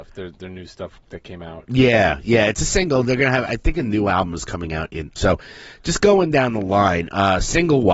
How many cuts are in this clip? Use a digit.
2